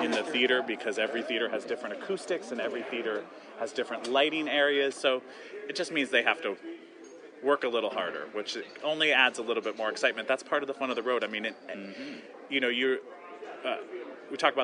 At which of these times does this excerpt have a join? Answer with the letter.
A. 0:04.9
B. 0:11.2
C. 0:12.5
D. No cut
A